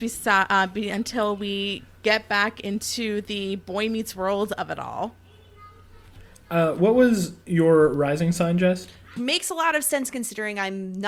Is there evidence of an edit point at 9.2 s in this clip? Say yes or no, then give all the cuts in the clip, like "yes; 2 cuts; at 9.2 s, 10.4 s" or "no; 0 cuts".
yes; 1 cut; at 9.2 s